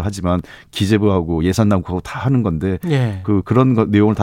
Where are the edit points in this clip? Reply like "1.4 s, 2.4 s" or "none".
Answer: none